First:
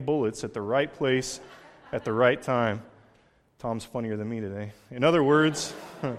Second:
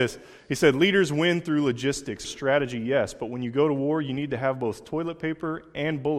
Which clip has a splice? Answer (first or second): second